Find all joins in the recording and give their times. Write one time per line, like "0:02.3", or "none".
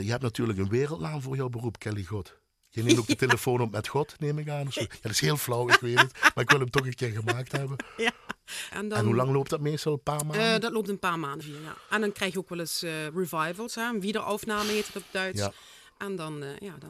0:08.7
0:11.4